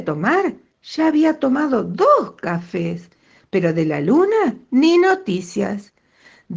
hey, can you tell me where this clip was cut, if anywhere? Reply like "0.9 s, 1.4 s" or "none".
none